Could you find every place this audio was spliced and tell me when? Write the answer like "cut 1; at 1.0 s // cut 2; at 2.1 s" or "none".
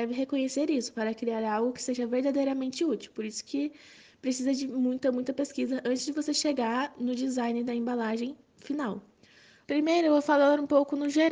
cut 1; at 9.6 s